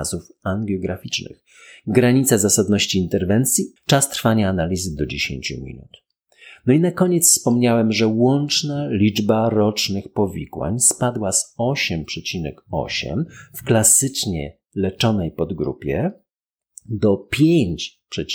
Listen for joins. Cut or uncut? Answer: cut